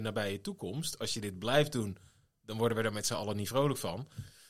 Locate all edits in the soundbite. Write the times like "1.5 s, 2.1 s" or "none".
none